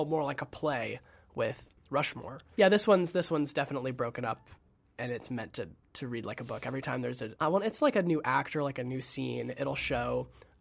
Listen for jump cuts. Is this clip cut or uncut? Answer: cut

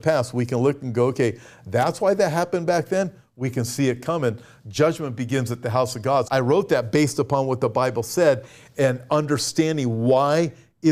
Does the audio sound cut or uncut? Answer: cut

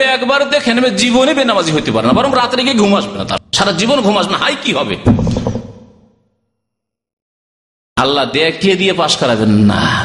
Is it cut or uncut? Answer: cut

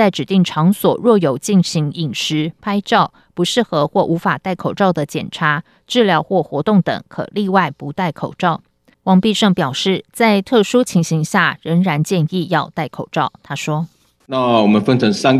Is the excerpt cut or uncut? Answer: uncut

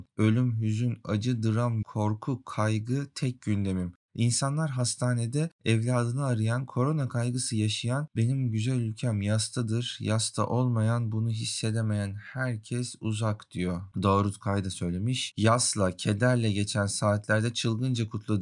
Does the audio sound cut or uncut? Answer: cut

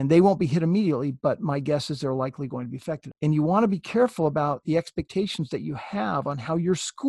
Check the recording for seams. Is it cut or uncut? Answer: cut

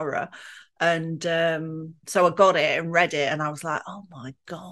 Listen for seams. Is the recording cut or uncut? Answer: cut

